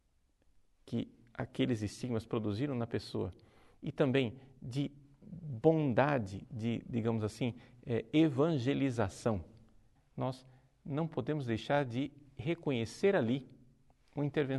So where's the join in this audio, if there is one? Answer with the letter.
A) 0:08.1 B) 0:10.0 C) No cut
B